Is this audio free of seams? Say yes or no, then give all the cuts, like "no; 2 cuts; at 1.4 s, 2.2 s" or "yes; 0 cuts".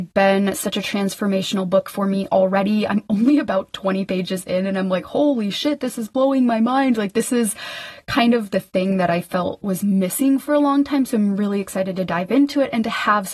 yes; 0 cuts